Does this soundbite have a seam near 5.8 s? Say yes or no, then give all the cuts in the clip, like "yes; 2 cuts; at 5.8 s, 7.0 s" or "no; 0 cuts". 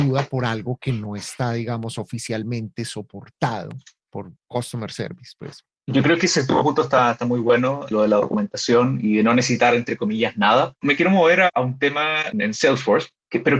no; 3 cuts; at 7.9 s, 10.8 s, 12.3 s